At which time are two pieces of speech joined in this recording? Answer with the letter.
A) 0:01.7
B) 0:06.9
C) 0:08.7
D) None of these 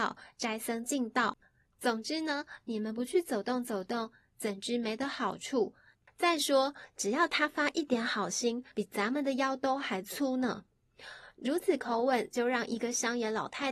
C